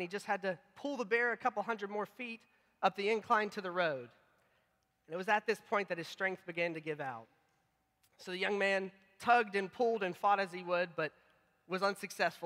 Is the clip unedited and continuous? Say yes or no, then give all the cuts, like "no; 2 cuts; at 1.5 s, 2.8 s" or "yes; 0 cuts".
yes; 0 cuts